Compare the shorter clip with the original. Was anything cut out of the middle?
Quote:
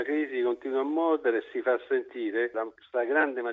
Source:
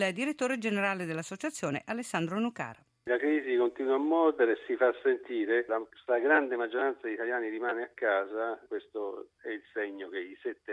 no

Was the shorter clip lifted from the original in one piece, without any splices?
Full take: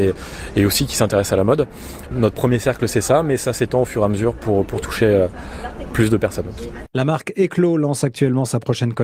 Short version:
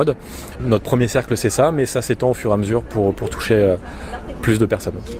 yes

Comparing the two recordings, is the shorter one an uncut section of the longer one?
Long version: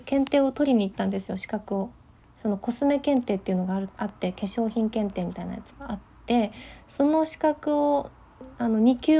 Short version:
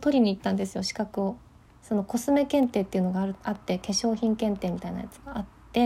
yes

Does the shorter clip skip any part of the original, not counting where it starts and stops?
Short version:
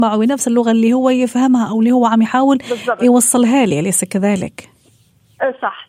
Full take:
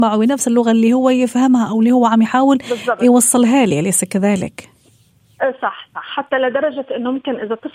no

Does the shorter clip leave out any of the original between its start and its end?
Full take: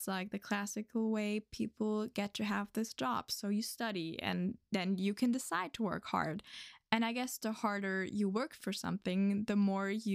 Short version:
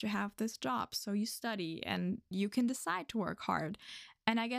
yes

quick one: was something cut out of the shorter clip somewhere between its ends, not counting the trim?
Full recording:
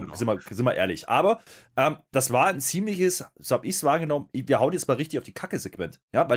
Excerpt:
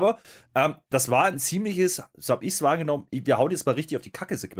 no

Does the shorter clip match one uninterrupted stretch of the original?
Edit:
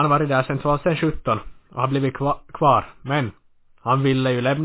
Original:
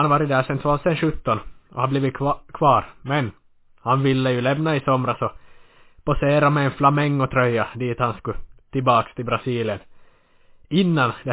yes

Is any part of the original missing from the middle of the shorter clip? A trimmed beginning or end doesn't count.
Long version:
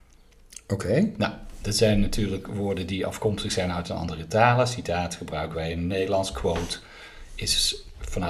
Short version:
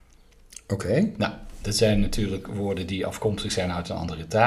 no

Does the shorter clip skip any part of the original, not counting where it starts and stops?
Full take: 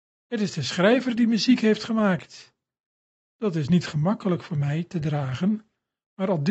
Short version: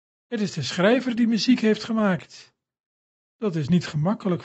no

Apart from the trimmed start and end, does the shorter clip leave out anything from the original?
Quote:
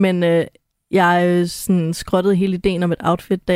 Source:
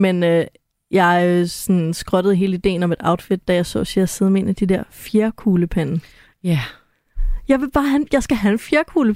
no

